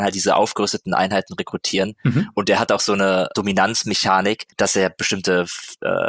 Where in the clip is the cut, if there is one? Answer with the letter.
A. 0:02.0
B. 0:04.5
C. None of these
B